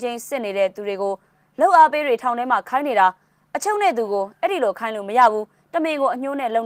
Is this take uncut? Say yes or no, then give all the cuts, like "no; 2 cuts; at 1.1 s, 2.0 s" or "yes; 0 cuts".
yes; 0 cuts